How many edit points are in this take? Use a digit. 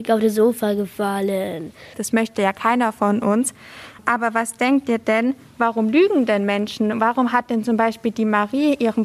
1